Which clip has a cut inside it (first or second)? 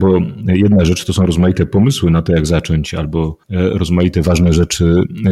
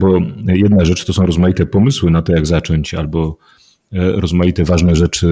first